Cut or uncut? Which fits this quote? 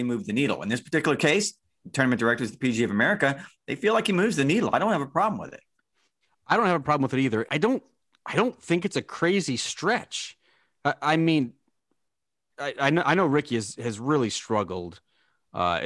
cut